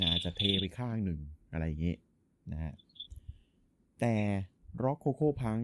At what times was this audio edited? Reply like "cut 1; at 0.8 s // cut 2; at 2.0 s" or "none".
none